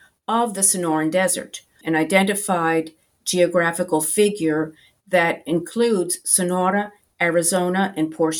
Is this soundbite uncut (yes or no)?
no